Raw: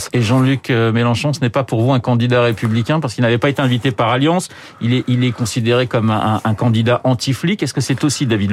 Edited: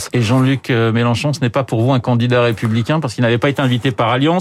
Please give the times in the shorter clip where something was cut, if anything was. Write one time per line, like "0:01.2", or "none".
none